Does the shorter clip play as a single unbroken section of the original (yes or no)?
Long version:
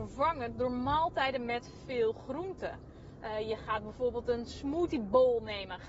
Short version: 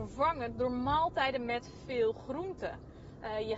yes